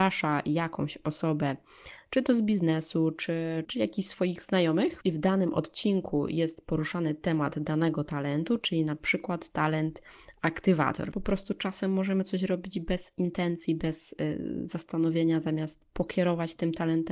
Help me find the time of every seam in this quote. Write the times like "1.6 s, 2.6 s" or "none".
3.6 s, 11.1 s